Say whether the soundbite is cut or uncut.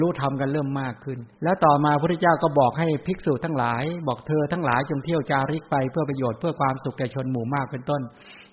cut